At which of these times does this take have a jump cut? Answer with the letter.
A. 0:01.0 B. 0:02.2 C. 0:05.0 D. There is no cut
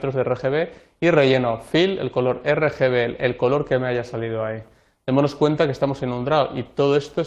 D